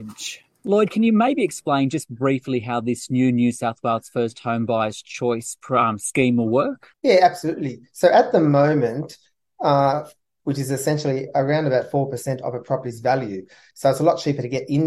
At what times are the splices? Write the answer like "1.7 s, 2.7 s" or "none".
6.9 s, 10.4 s, 13.7 s